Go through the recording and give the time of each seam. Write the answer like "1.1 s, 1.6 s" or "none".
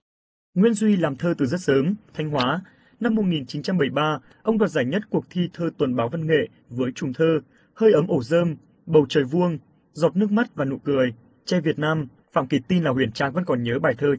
2.1 s, 12.2 s